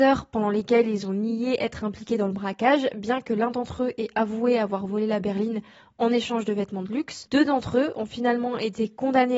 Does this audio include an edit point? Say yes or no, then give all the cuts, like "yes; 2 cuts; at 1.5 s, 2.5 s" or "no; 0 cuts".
no; 0 cuts